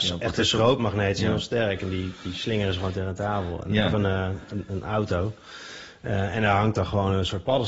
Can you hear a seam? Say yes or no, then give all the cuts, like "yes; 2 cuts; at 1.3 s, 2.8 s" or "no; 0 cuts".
no; 0 cuts